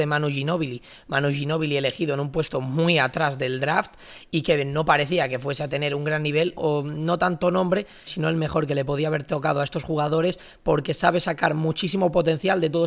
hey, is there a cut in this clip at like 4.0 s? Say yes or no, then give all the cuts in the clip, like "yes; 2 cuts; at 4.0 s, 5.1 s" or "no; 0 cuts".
no; 2 cuts; at 6.6 s, 8.1 s